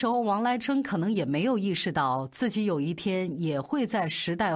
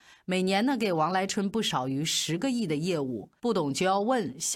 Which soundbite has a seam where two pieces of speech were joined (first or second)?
second